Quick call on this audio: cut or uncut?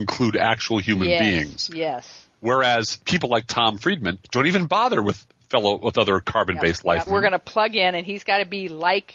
cut